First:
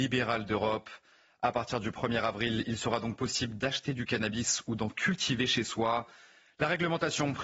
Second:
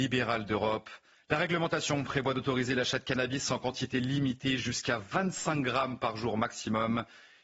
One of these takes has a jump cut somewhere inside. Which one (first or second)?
second